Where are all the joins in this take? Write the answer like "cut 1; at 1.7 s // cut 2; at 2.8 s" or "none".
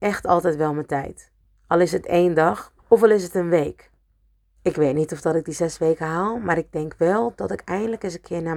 cut 1; at 2.8 s // cut 2; at 4.6 s